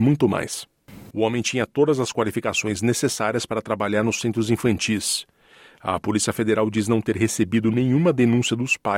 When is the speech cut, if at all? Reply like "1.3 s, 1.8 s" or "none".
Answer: 1.1 s